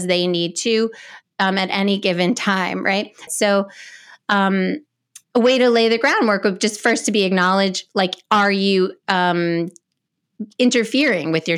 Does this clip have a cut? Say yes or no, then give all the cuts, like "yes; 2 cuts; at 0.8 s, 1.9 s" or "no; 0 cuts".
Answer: yes; 2 cuts; at 3.3 s, 5.2 s